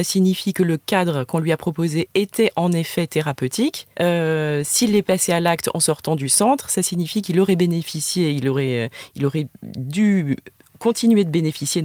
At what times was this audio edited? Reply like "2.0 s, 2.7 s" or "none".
3.9 s

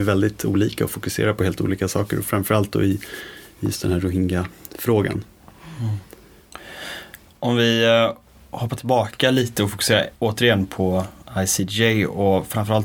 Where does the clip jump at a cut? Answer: 10.1 s

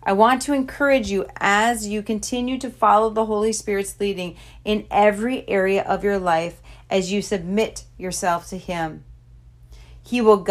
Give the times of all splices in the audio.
none

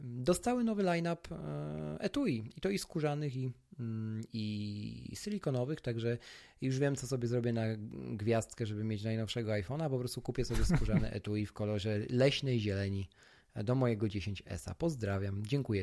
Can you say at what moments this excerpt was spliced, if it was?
4.3 s

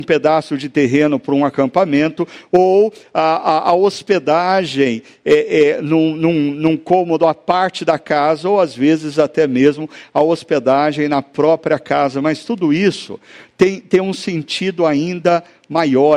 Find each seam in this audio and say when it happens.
none

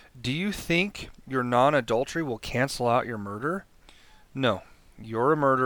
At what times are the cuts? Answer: none

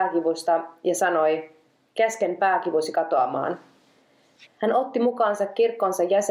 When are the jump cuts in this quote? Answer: 4.4 s

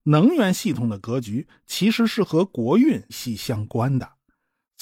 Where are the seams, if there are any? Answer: 3.1 s

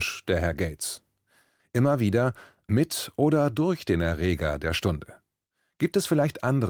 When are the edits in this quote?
1.6 s

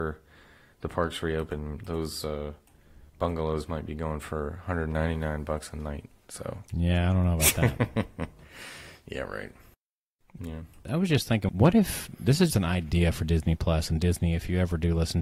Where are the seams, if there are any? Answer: 10.4 s, 12.5 s

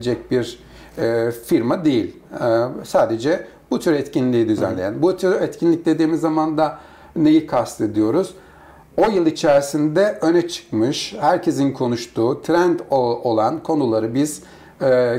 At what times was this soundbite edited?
none

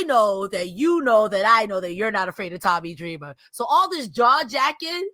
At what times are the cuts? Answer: none

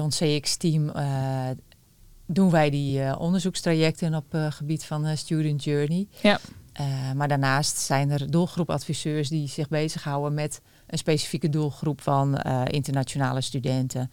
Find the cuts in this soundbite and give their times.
none

